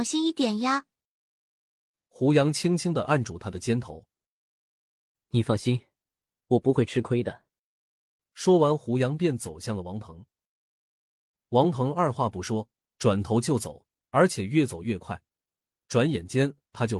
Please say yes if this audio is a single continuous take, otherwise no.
yes